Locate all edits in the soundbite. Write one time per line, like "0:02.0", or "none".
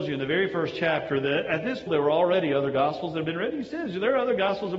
0:01.9